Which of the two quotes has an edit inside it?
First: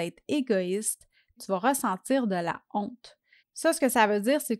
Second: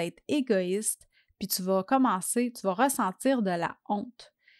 first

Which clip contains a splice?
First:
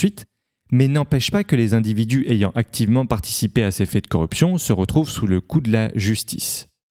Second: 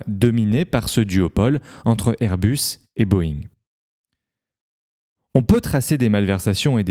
second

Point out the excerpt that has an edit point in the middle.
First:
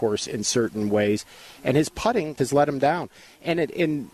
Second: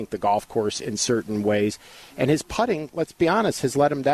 first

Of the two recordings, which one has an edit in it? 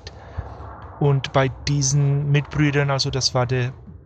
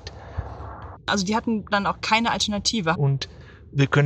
second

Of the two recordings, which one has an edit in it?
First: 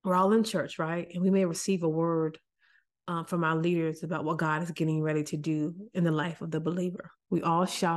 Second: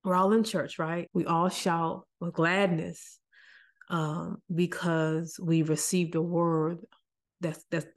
second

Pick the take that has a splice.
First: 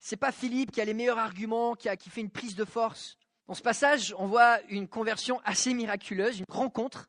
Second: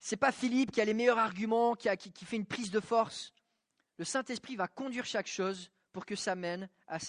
first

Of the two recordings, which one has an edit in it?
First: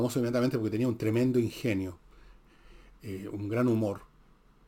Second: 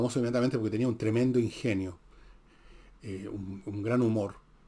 first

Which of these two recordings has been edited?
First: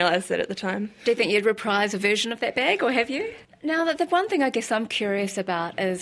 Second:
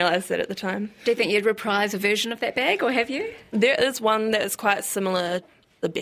first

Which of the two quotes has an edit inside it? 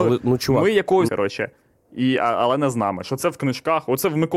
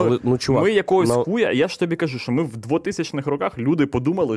first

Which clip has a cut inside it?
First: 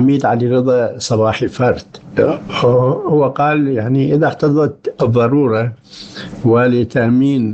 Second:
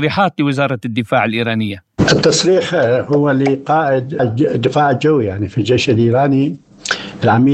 second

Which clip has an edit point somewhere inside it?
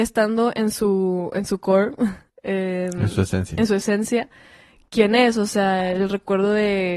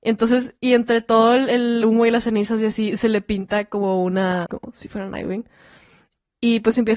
second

